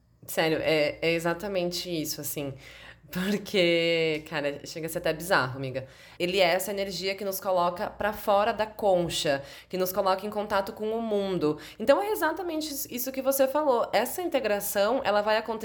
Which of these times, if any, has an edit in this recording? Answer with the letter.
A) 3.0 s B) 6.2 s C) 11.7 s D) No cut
B